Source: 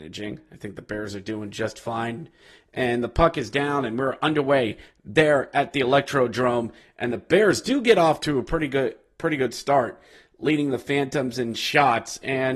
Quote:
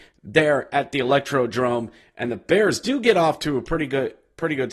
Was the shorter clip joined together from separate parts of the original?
no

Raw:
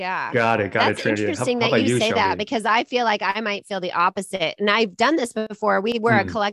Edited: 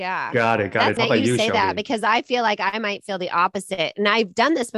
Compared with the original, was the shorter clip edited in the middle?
yes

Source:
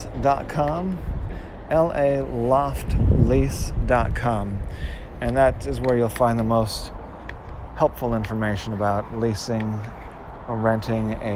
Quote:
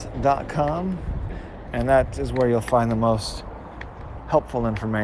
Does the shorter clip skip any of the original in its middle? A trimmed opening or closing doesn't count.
yes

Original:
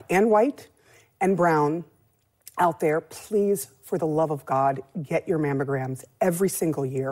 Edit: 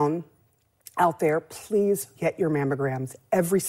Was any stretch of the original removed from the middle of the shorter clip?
yes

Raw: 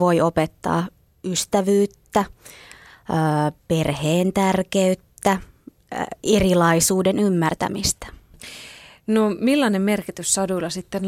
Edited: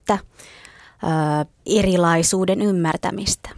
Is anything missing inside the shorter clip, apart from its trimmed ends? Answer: yes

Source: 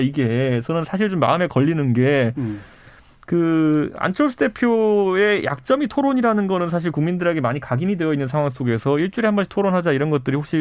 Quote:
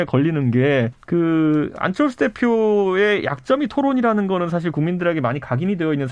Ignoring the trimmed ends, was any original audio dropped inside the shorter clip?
yes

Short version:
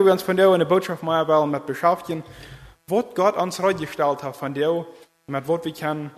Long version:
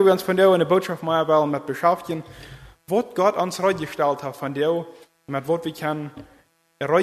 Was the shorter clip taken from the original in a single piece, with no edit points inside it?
yes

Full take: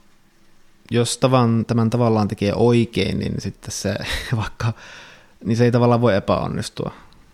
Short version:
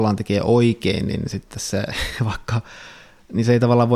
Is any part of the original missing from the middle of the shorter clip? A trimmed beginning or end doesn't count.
no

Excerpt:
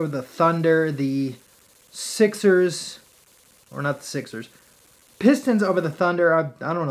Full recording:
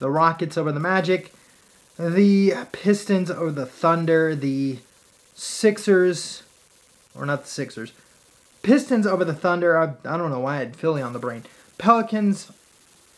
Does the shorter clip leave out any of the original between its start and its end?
no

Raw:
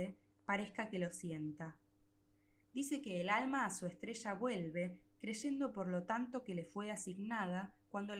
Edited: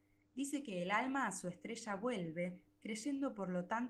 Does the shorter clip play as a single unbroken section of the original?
yes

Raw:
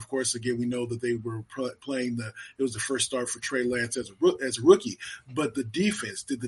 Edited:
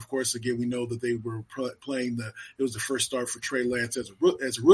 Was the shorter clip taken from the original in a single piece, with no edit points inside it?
yes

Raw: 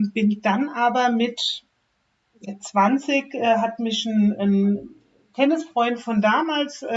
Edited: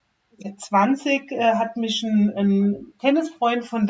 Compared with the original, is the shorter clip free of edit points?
no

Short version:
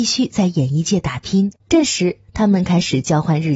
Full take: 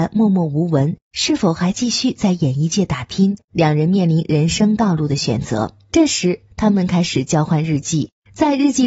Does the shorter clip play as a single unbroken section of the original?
no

